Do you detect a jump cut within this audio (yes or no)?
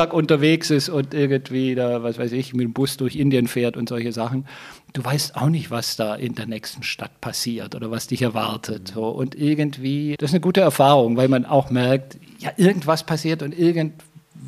yes